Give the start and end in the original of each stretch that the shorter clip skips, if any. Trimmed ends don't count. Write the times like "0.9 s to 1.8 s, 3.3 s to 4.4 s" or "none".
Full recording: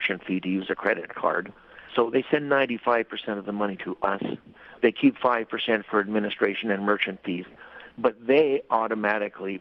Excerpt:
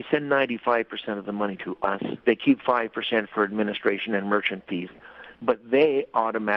4.4 s to 4.8 s

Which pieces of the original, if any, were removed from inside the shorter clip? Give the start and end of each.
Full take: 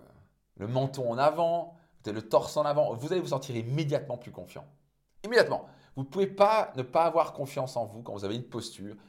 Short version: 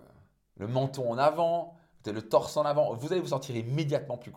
none

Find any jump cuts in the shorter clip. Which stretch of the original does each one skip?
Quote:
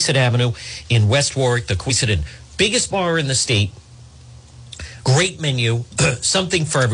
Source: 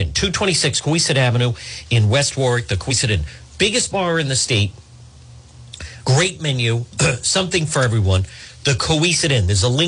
none

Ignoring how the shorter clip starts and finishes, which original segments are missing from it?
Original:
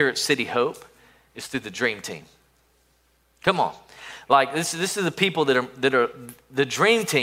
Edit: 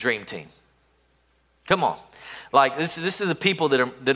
none

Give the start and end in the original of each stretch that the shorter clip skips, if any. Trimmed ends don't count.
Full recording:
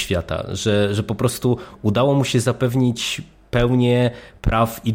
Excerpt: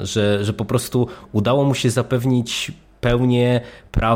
none

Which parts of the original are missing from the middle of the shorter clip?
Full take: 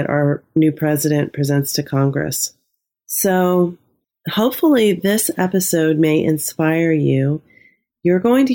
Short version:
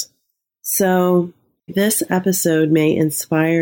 4.1 s to 5.0 s

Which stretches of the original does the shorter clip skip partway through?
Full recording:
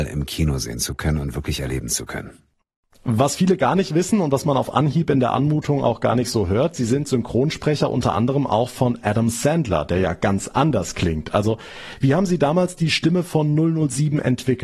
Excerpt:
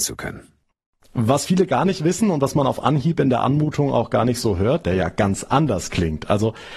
6.7 s to 9.9 s

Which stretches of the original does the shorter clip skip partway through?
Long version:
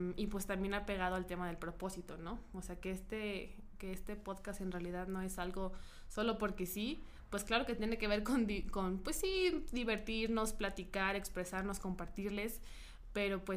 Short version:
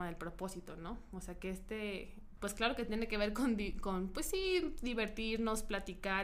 3.8 s to 7.3 s

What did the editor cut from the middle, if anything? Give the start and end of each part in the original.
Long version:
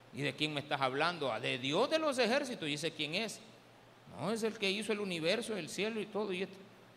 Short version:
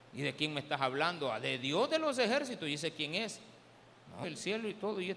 4.2 s to 5.6 s

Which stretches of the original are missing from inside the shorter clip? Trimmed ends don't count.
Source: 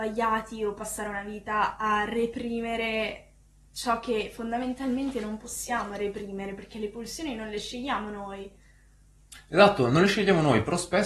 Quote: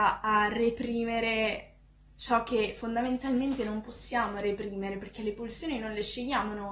none

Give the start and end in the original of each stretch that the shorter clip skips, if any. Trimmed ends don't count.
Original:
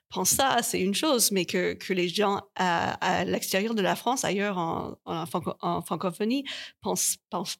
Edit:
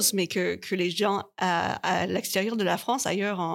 none

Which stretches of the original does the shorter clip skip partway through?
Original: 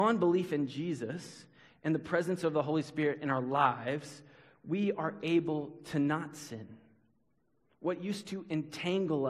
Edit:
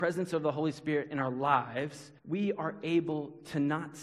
4.3 s to 4.6 s

